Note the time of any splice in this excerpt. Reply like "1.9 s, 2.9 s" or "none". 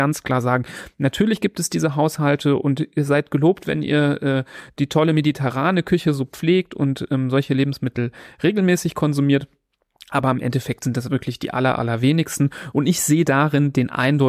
none